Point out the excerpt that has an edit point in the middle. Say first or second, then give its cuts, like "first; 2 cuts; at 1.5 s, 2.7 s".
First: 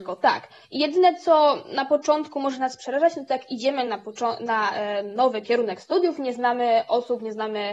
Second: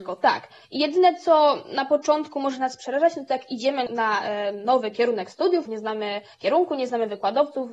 second; 2 cuts; at 3.9 s, 5.7 s